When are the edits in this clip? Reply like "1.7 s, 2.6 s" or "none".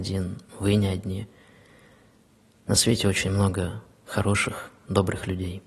none